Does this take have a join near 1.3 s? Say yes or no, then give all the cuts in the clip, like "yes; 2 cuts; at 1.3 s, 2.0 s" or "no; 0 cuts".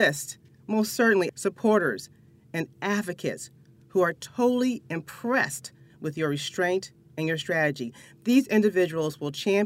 yes; 1 cut; at 1.3 s